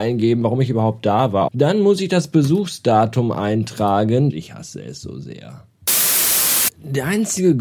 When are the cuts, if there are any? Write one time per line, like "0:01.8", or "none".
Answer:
0:01.5
0:04.3